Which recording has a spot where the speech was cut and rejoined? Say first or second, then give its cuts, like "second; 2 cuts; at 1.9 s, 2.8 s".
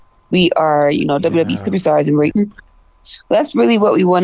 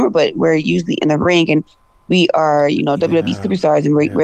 first; 1 cut; at 2.3 s